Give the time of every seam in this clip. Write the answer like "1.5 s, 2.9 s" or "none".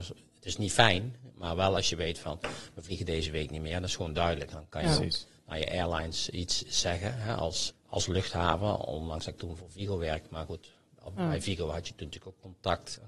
7.7 s